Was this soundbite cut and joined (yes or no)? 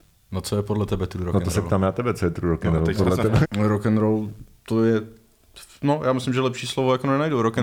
yes